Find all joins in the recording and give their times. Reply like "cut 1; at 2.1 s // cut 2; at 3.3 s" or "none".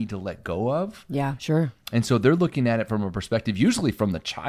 cut 1; at 1.4 s